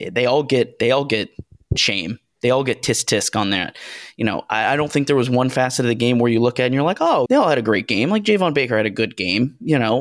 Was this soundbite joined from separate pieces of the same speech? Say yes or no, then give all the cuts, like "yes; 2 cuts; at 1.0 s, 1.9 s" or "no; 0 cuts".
yes; 1 cut; at 7.3 s